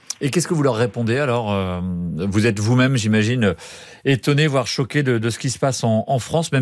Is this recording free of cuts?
yes; 0 cuts

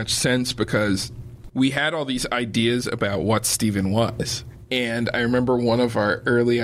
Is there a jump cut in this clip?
no; 0 cuts

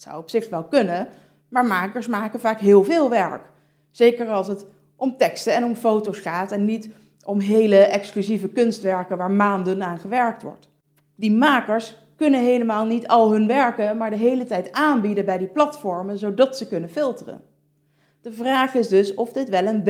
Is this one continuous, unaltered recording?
yes; 0 cuts

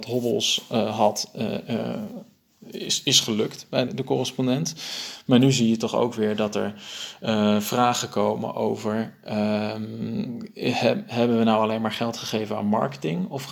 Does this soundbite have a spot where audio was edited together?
yes; 1 cut; at 3.9 s

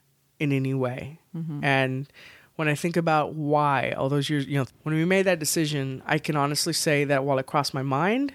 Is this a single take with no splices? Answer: no; 1 cut; at 4.7 s

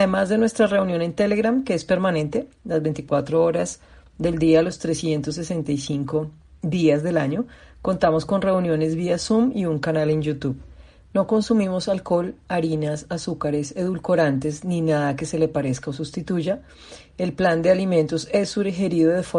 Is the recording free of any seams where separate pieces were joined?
no; 1 cut; at 11.0 s

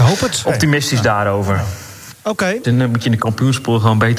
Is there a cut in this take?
yes; 1 cut; at 2.6 s

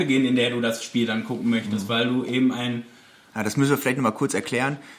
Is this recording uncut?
no; 1 cut; at 3.3 s

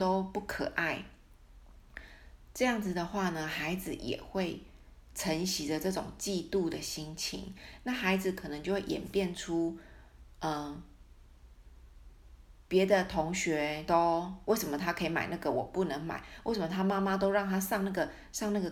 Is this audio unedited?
yes; 0 cuts

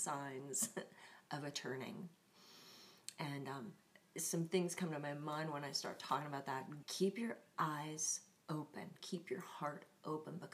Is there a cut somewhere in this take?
yes; 2 cuts; at 6.8 s, 9.0 s

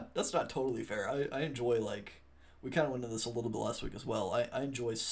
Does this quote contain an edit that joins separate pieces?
no; 0 cuts

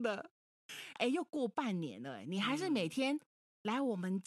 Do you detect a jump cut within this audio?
yes; 1 cut; at 1.0 s

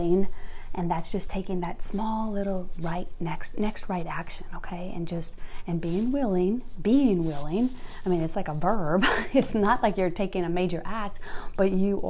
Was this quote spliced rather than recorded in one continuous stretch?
no; 0 cuts

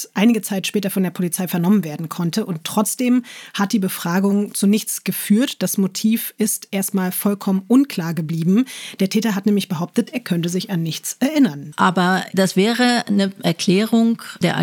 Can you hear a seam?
yes; 1 cut; at 11.7 s

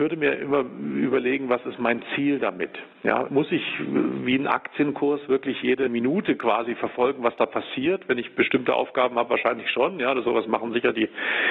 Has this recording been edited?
no; 0 cuts

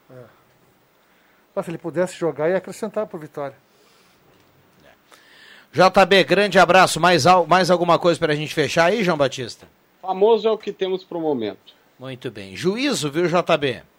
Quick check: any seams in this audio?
no; 0 cuts

